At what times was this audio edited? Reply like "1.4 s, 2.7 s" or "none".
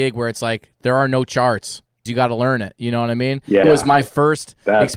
2.1 s, 3.6 s